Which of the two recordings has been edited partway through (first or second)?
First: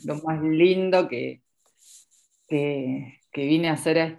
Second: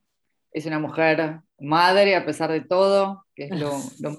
second